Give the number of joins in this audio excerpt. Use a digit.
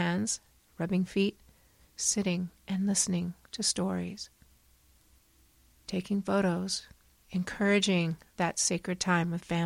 2